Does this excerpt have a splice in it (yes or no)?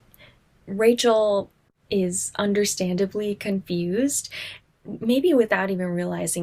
no